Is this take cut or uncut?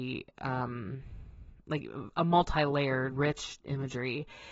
cut